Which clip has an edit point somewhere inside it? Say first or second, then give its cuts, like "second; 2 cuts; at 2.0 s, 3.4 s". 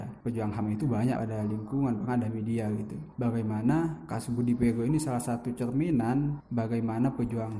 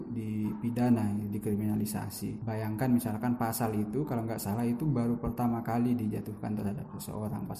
first; 1 cut; at 1.1 s